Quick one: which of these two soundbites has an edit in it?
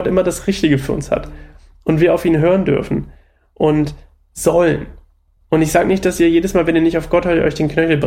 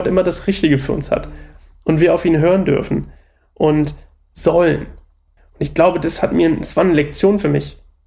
second; 1 cut; at 5.4 s

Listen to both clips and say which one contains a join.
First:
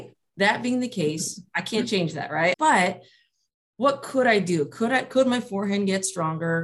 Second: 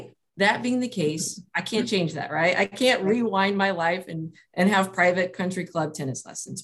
first; 1 cut; at 2.5 s

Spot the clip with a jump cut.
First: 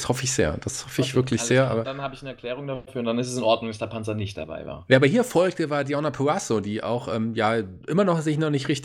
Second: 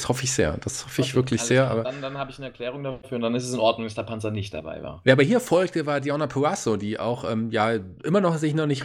first; 1 cut; at 1.8 s

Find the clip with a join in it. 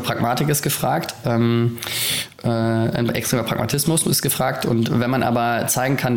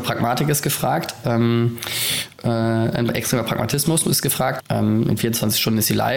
second; 1 cut; at 4.6 s

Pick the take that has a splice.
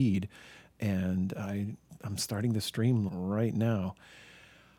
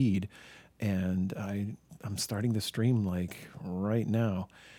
first; 1 cut; at 3.1 s

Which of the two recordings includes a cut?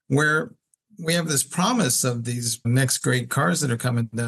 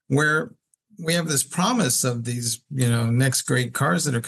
first; 1 cut; at 2.6 s

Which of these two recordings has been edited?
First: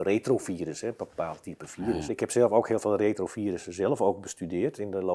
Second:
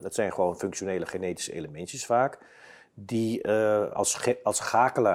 first; 1 cut; at 2.1 s

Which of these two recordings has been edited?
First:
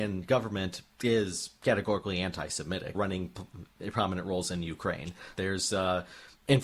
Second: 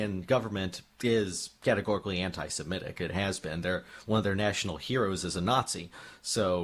first; 2 cuts; at 2.9 s, 5.3 s

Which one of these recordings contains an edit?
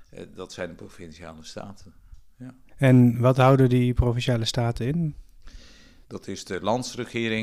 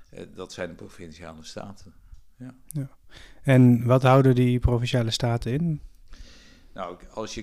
first; 2 cuts; at 2.7 s, 6.0 s

